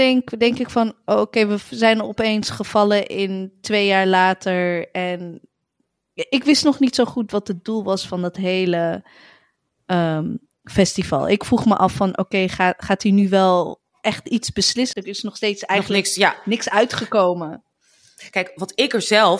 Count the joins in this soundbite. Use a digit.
2